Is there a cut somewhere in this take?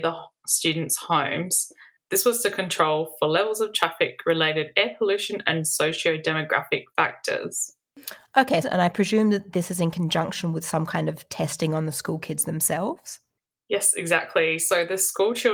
yes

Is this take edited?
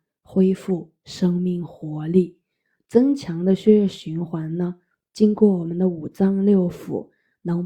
no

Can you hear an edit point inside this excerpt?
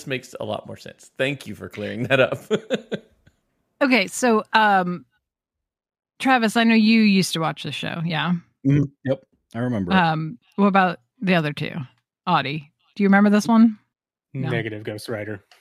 no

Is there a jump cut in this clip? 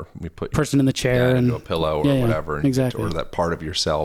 no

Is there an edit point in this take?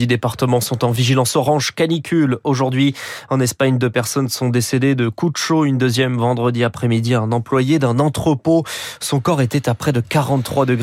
no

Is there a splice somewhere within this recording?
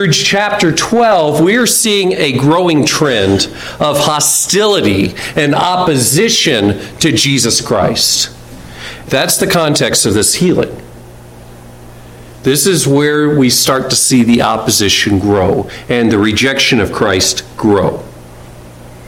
yes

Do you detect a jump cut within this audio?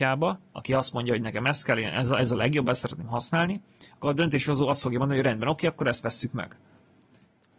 no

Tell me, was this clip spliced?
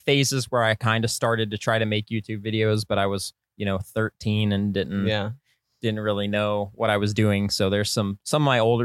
no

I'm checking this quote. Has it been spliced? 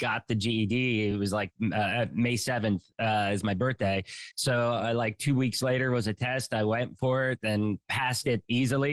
no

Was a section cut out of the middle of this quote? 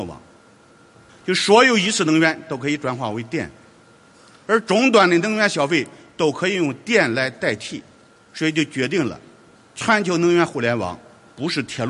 yes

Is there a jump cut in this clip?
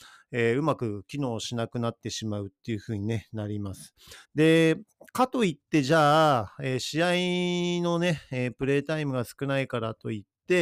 yes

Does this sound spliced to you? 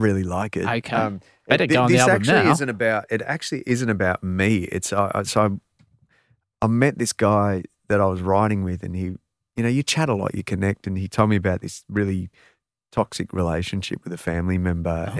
no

